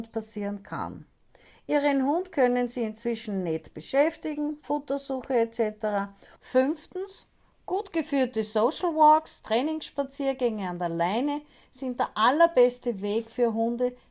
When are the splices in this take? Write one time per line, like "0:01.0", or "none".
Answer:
0:06.4